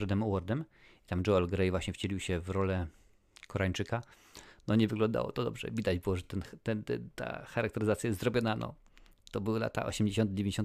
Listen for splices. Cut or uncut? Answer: uncut